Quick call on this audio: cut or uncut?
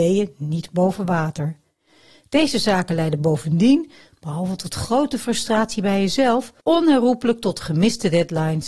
cut